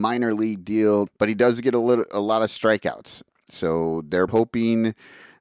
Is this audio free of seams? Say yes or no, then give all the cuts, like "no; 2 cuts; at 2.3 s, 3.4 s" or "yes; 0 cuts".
no; 2 cuts; at 1.1 s, 4.3 s